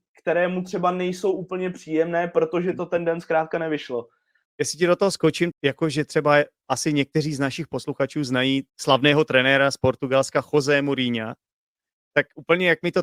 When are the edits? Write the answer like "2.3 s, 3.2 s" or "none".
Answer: 4.5 s, 5.5 s, 8.7 s